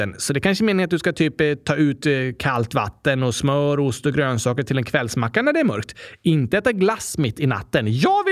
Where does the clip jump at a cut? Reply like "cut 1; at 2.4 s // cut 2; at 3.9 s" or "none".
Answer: none

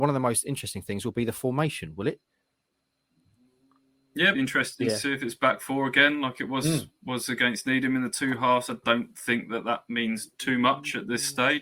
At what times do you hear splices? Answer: cut 1; at 4.3 s

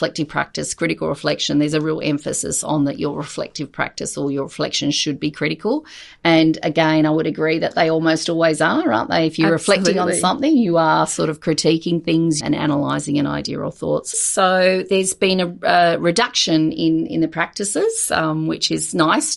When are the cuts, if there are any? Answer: cut 1; at 12.4 s // cut 2; at 14.1 s

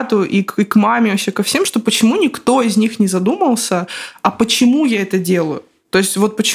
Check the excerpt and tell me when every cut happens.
none

